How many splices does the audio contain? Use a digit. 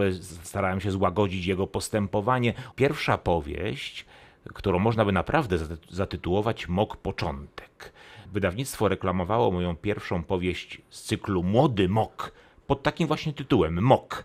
2